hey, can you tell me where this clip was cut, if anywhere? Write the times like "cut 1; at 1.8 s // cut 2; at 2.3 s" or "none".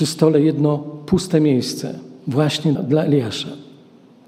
cut 1; at 2.8 s